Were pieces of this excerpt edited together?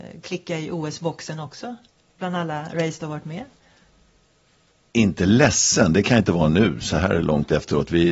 no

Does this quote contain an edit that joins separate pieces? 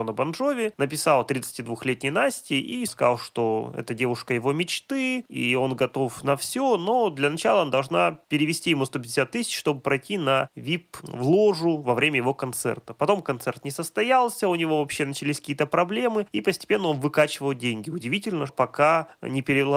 yes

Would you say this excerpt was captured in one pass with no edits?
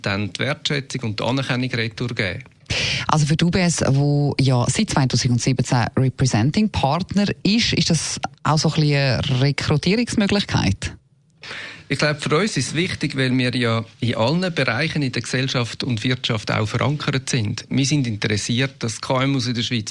yes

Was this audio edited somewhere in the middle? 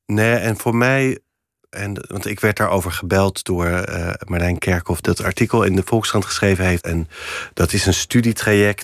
yes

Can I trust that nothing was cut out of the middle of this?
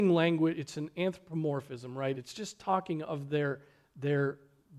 no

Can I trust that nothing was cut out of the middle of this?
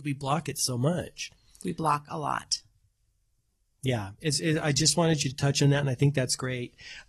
yes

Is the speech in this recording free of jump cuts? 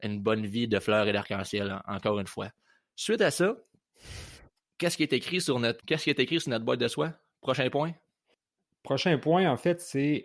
no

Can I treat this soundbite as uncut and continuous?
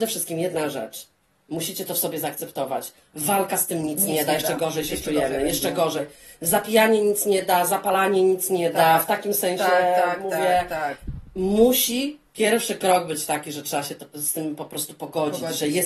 yes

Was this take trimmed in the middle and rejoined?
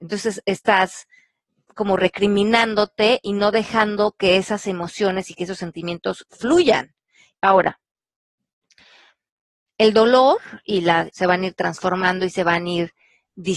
yes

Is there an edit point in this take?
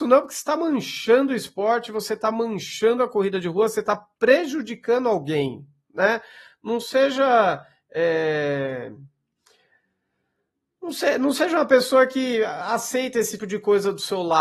yes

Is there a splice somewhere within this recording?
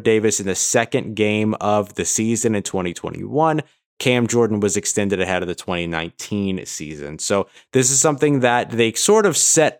no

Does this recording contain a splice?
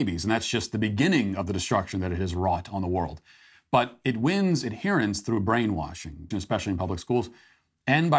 yes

